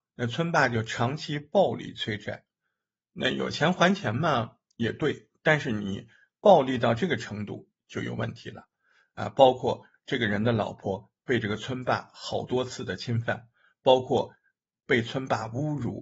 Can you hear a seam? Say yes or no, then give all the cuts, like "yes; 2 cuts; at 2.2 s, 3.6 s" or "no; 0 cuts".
no; 0 cuts